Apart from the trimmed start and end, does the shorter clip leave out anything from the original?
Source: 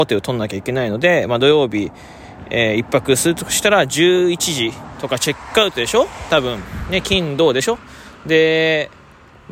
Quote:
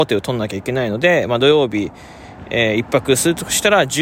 no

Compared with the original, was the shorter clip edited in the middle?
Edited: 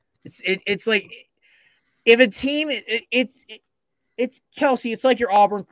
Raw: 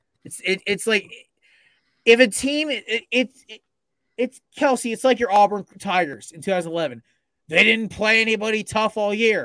no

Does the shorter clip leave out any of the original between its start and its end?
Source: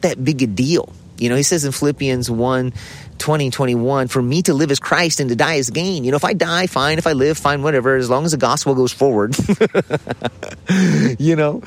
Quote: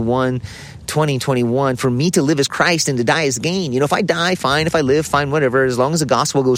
no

